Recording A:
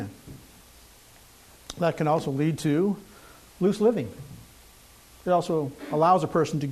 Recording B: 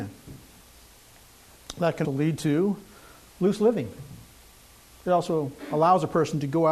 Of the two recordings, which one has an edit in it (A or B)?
B